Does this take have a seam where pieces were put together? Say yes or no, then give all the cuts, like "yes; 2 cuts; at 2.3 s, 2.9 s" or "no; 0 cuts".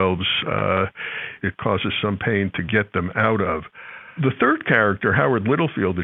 yes; 1 cut; at 1.4 s